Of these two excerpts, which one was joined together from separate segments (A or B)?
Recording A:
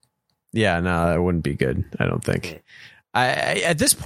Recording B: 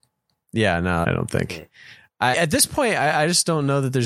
B